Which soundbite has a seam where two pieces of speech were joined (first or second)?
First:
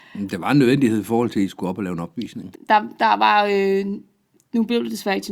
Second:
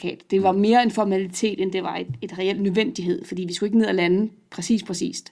first